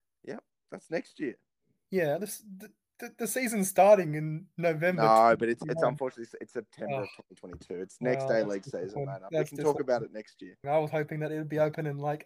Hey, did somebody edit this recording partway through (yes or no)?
yes